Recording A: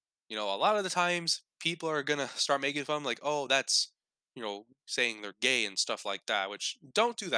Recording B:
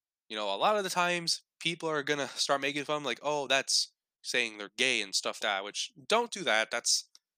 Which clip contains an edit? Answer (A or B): B